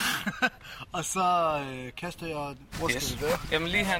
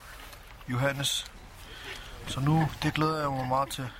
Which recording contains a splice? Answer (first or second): first